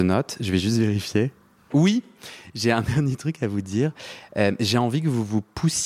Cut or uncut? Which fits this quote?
uncut